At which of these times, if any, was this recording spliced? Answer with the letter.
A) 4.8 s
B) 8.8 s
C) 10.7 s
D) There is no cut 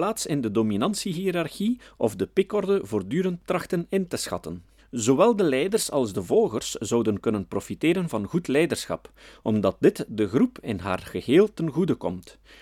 A